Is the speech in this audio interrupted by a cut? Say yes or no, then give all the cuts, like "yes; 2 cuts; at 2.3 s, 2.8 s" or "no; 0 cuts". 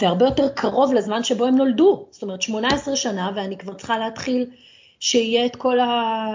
no; 0 cuts